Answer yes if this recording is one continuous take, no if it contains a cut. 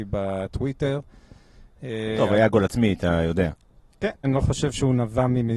no